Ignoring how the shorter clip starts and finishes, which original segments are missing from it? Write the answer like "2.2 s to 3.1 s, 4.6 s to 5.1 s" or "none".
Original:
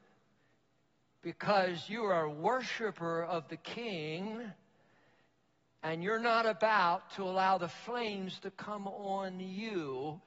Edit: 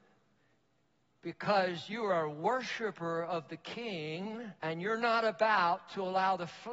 4.6 s to 5.8 s